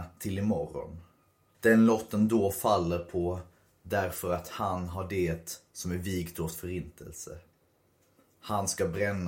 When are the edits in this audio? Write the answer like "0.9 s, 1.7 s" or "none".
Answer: 1.5 s